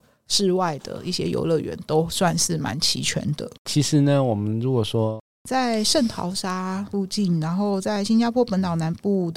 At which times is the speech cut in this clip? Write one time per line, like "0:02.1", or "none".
0:03.6
0:05.3